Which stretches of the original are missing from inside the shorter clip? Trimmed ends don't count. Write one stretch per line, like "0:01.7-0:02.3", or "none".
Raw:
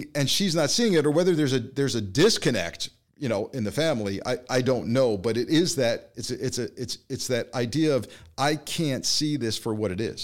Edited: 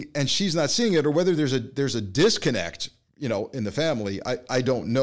none